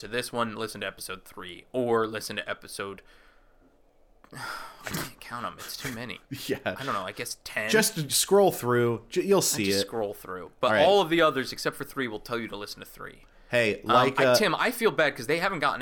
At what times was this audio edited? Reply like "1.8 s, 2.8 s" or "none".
none